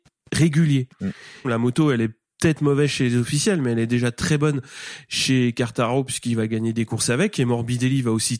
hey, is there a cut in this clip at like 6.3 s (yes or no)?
no